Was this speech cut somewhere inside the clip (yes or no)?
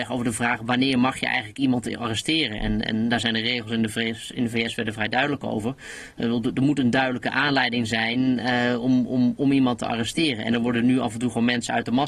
no